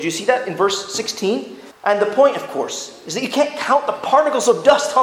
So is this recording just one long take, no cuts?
no; 1 cut; at 1.7 s

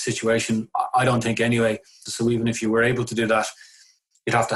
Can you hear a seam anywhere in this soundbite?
yes; 1 cut; at 2.1 s

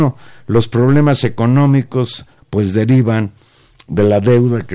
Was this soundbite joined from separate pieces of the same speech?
yes; 1 cut; at 2.4 s

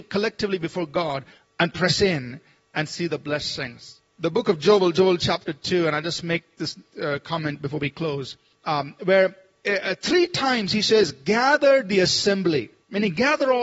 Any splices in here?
no; 0 cuts

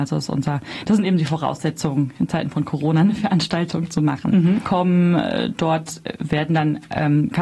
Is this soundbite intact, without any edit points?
no; 1 cut; at 4.7 s

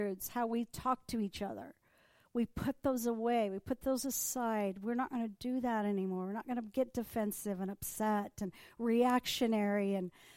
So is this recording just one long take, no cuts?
yes; 0 cuts

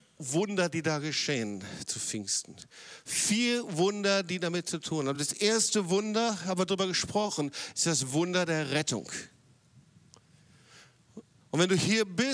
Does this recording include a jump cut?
no; 0 cuts

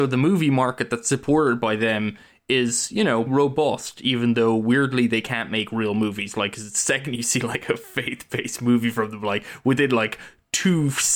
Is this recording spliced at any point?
yes; 1 cut; at 3.3 s

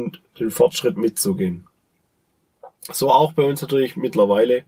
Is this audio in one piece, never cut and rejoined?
yes; 0 cuts

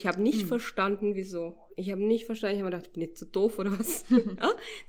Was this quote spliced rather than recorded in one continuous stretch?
no; 0 cuts

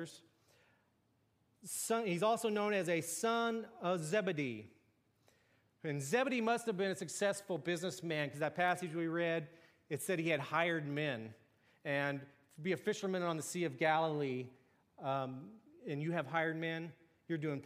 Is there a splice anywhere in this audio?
no; 0 cuts

